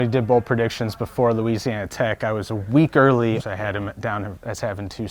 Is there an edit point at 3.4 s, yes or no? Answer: yes